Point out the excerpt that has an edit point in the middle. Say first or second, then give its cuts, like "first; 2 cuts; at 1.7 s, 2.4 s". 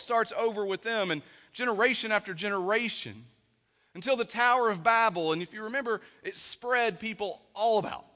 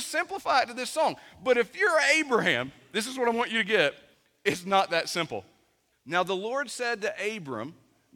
second; 1 cut; at 5.9 s